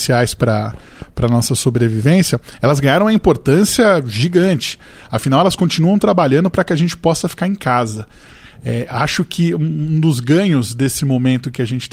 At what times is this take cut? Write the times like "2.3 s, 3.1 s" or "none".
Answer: none